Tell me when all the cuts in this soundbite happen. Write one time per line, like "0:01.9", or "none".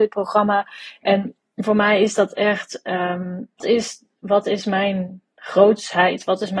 0:03.6